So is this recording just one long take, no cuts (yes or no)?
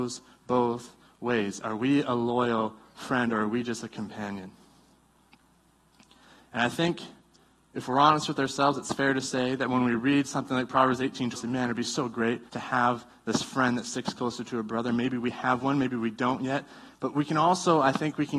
no